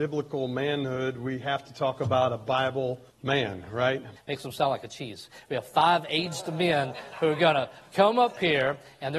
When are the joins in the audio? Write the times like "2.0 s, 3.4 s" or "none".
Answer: 3.1 s, 4.2 s